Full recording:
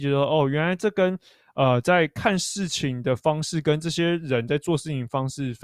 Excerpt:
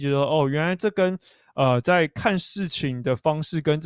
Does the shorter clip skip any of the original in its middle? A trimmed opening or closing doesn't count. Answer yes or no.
no